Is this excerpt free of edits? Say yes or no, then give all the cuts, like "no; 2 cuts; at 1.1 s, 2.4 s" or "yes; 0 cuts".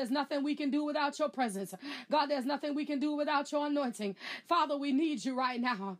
no; 1 cut; at 4.4 s